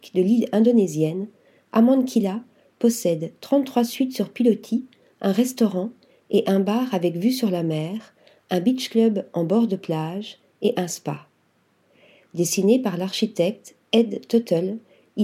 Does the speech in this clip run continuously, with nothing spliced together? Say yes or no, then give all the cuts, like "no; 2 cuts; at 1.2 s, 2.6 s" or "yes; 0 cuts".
yes; 0 cuts